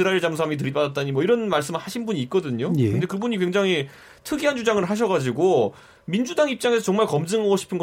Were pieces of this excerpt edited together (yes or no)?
no